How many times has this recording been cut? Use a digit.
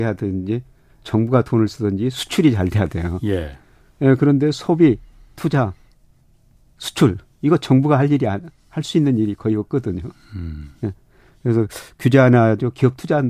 0